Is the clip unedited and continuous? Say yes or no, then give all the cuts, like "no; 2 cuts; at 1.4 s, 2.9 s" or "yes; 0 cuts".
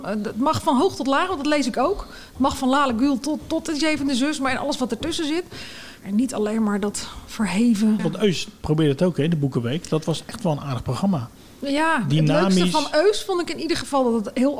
no; 2 cuts; at 6.0 s, 8.0 s